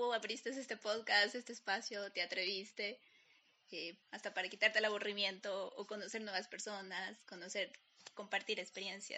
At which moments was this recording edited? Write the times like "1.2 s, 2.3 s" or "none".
4.0 s